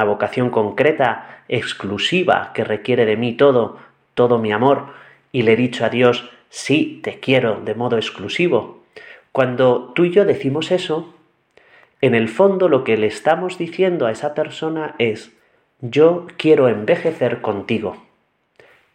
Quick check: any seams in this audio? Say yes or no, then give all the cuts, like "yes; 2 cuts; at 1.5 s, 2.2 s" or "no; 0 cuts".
no; 0 cuts